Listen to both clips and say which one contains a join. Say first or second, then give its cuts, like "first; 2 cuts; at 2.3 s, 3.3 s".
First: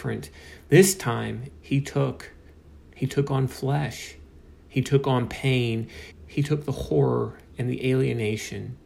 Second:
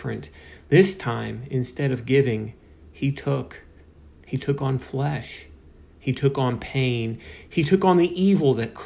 first; 2 cuts; at 1.5 s, 6.1 s